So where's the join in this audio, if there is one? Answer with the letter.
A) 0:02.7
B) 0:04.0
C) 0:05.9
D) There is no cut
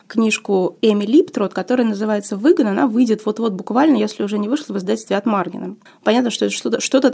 C